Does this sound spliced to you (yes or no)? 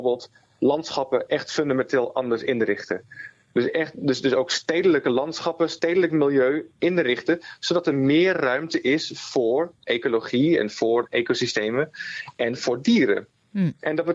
no